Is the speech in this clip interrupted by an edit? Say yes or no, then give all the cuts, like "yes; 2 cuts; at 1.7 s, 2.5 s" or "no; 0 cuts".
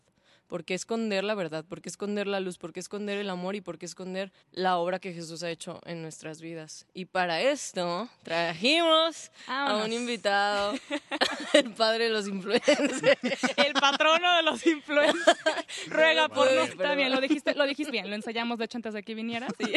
yes; 3 cuts; at 4.4 s, 16.7 s, 17.9 s